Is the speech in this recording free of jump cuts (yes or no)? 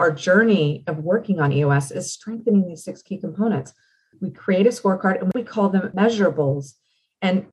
no